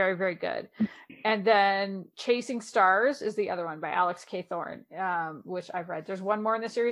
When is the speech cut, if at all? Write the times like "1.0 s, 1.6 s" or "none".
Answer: none